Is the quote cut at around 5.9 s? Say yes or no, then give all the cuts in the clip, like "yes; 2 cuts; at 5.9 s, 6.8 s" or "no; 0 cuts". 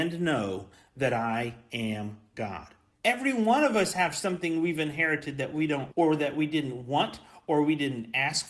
yes; 2 cuts; at 2.9 s, 5.9 s